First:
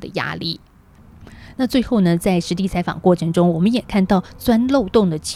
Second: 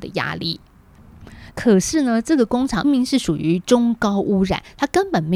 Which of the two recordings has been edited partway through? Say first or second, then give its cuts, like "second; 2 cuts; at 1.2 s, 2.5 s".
second; 2 cuts; at 1.5 s, 2.8 s